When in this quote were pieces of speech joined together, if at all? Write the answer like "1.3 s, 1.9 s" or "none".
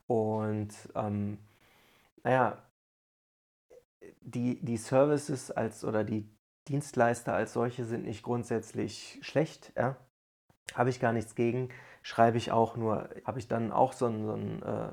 13.2 s